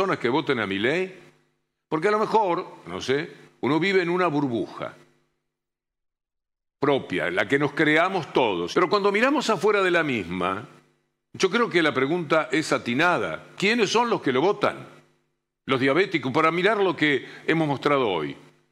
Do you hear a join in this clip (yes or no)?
yes